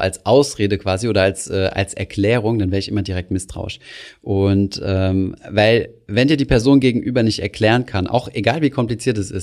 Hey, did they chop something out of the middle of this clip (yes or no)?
no